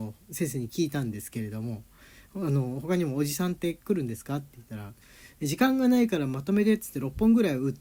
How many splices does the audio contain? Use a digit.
0